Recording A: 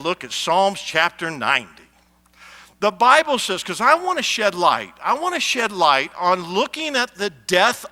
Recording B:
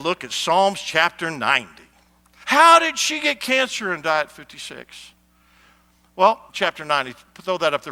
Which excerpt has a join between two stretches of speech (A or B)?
B